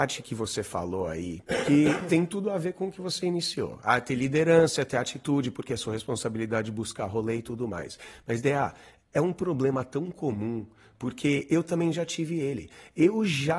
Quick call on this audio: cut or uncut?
uncut